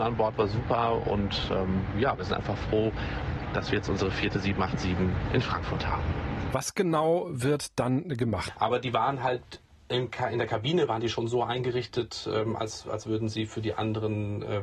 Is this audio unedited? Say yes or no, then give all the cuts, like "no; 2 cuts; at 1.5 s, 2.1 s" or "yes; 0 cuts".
no; 2 cuts; at 6.5 s, 8.5 s